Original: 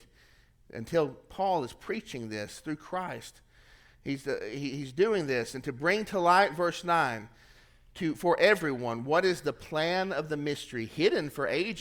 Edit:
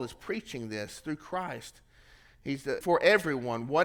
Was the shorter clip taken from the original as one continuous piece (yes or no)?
no